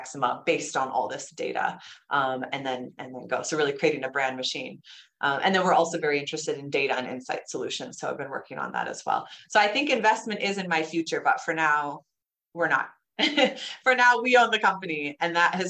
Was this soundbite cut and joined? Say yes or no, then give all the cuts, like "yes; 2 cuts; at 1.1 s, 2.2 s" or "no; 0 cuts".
no; 0 cuts